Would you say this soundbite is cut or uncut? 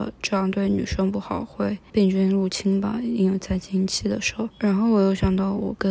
uncut